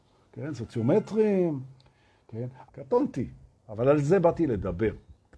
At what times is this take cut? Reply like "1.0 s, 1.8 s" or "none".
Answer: 2.7 s